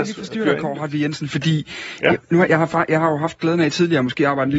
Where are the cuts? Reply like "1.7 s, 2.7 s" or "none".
2.5 s